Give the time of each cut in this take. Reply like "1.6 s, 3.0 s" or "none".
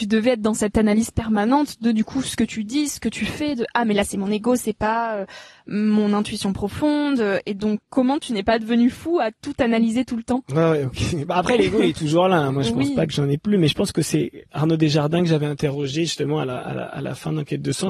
none